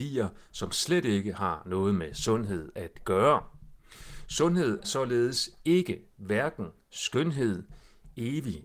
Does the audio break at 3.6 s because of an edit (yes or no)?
no